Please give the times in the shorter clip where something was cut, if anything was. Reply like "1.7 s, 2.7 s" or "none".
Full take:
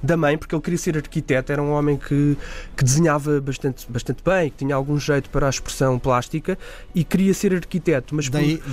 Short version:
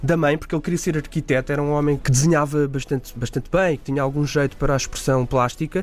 2.0 s